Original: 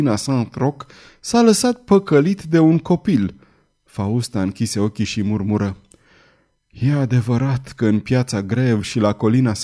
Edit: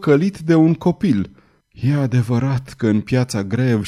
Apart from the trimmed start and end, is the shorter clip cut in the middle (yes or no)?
yes